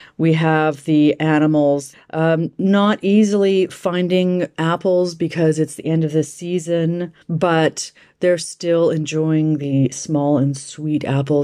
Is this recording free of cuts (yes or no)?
no